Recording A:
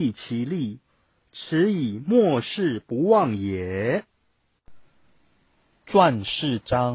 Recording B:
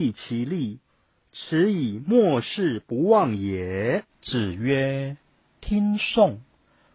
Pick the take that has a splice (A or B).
B